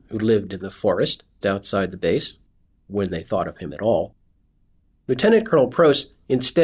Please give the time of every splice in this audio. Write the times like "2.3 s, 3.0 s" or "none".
1.4 s